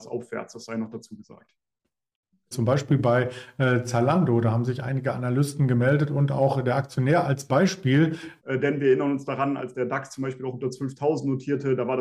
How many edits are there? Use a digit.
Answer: 2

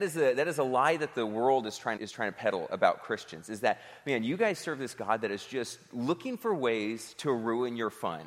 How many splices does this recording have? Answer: 1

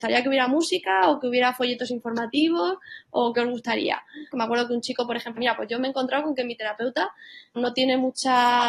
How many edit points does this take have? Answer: 3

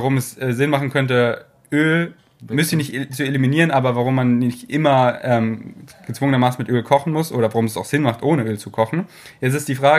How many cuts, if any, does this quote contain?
0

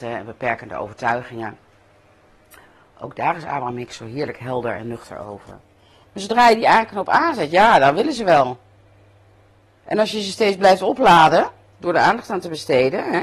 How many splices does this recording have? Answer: 1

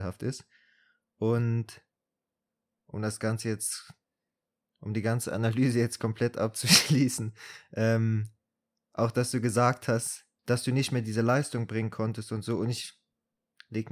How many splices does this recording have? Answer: 0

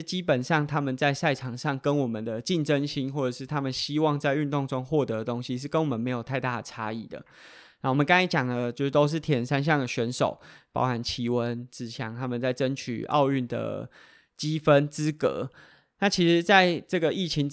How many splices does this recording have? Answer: 0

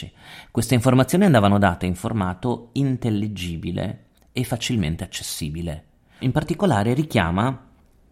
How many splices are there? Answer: 1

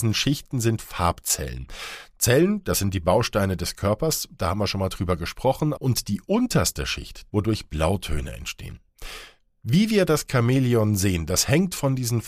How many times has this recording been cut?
2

